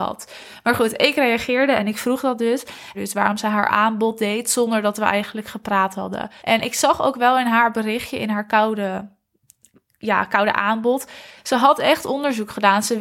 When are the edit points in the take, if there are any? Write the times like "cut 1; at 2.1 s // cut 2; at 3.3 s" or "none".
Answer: cut 1; at 2.9 s // cut 2; at 6.4 s // cut 3; at 11.4 s